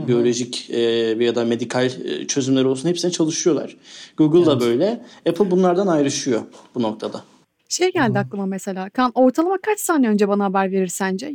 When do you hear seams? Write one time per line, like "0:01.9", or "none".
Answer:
none

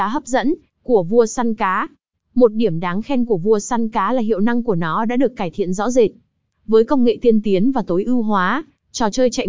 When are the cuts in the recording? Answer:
0:02.1

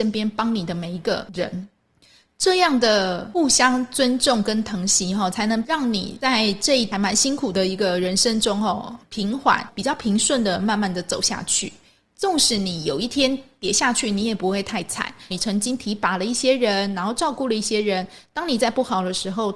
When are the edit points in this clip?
0:15.3

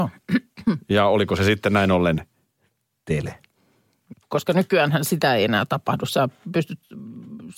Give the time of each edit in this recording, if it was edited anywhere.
0:04.1

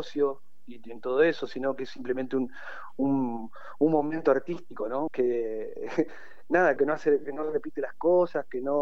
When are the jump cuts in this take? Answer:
0:05.1
0:06.8

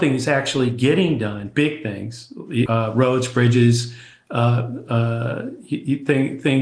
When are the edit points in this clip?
0:02.7

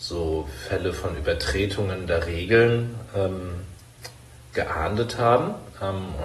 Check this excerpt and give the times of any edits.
none

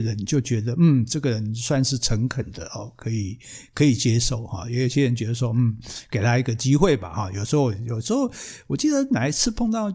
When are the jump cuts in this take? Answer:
none

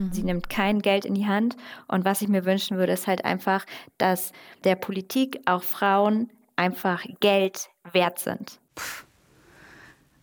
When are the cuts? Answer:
none

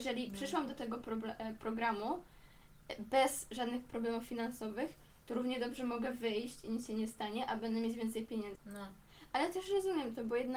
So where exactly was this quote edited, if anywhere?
0:08.6

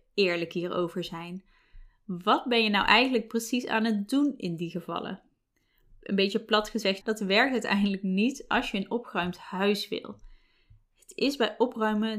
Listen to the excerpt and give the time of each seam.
0:07.0

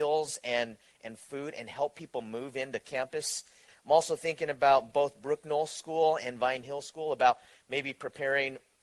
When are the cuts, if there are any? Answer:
0:03.7

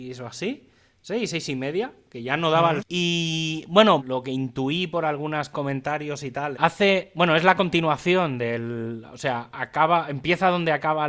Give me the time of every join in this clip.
0:02.8
0:04.0
0:06.5

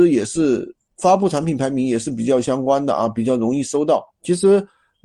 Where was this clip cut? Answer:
0:04.1

